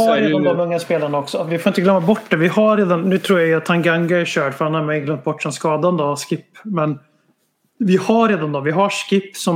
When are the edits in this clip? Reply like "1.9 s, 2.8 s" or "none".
none